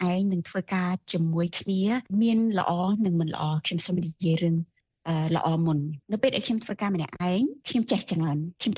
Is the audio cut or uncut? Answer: cut